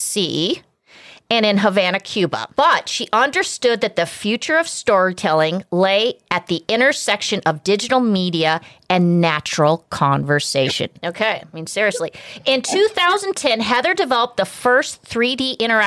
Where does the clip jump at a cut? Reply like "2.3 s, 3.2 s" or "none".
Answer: 11.0 s